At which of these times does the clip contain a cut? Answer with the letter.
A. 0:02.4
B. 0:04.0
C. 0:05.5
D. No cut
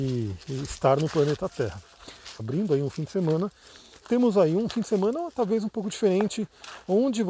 A